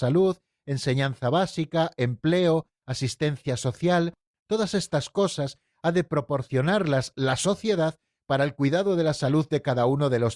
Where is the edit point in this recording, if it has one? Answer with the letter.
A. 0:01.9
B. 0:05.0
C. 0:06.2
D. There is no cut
D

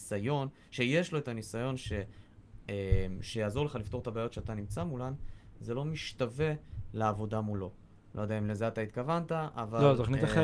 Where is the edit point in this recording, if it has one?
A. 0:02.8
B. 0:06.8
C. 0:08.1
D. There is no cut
C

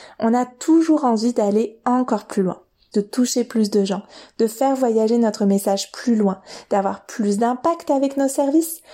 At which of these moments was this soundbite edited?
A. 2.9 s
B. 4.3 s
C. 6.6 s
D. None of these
A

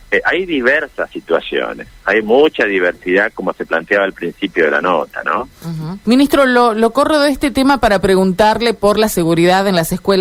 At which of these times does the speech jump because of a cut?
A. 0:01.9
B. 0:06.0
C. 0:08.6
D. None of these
B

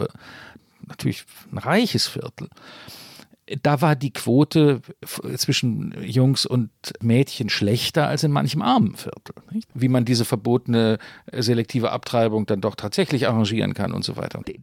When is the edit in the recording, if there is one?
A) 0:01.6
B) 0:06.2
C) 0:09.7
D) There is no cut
C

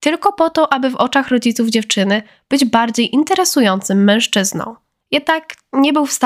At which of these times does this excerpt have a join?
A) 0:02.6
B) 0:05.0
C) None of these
B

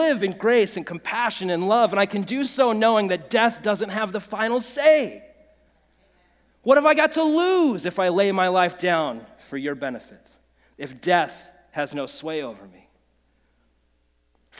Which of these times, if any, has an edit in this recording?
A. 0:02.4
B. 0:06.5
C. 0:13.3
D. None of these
D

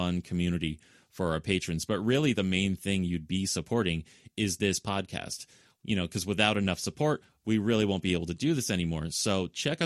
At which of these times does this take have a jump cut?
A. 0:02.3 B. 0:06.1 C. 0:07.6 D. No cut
D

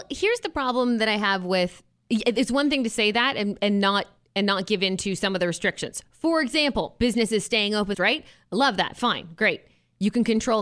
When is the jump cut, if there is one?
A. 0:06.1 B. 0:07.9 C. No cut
B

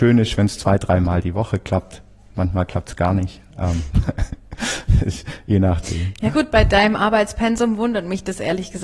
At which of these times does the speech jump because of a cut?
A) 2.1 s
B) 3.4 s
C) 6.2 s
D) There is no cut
D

